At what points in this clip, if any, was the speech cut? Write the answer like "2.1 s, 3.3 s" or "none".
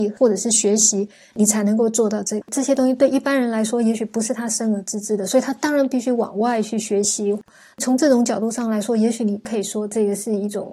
none